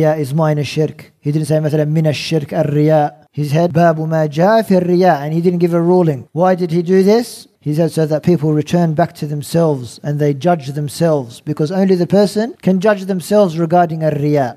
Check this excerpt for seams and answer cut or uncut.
uncut